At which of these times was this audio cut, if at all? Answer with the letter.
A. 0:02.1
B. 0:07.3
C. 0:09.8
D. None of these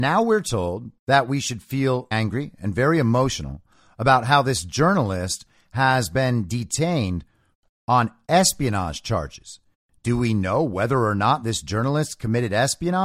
A